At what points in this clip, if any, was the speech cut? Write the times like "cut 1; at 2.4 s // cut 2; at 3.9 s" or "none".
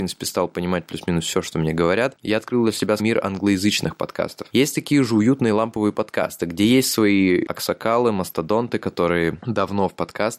cut 1; at 3.0 s // cut 2; at 4.5 s